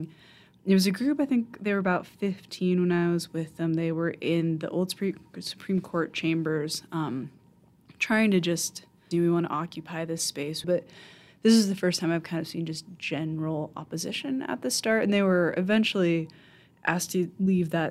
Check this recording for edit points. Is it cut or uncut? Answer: cut